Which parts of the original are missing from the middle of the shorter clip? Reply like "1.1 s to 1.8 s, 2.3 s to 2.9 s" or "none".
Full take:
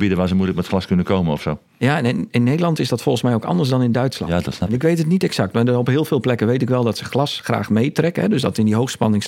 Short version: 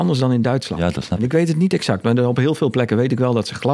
none